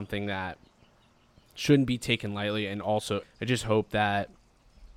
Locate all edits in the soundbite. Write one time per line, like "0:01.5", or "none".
0:03.2

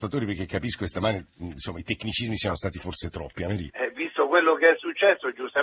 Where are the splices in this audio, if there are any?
0:03.7

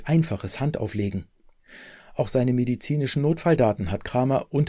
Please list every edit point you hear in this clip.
none

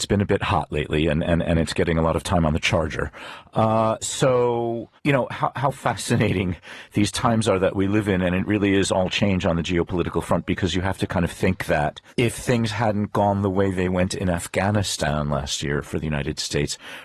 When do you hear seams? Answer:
0:05.0
0:12.1

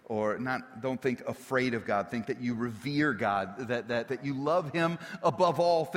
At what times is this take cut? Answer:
0:04.1

